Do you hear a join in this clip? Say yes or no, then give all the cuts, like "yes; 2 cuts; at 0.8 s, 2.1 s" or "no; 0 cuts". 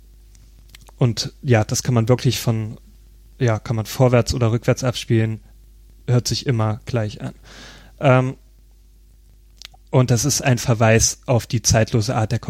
no; 0 cuts